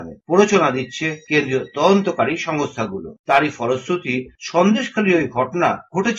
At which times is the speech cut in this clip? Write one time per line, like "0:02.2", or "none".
none